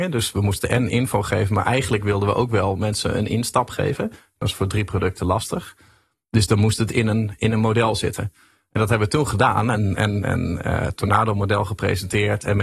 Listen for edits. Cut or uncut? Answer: uncut